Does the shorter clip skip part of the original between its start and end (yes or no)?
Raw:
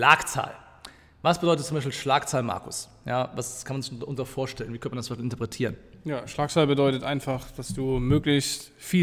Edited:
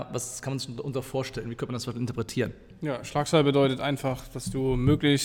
no